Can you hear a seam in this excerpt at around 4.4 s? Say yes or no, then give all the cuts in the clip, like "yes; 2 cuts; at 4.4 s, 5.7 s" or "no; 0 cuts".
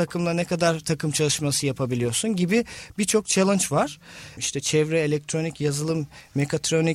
yes; 1 cut; at 4.4 s